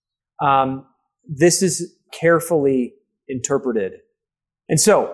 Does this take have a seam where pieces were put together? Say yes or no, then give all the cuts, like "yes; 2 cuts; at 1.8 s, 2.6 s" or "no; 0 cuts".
yes; 1 cut; at 2.1 s